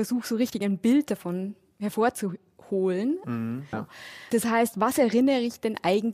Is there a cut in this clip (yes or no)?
yes